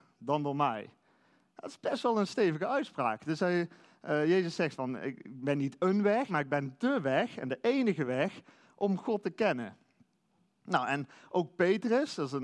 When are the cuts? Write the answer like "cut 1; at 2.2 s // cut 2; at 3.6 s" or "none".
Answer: cut 1; at 6.3 s